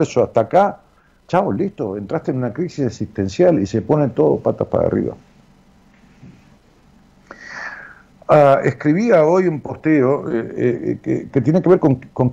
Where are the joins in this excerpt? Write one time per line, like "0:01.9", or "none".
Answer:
0:11.3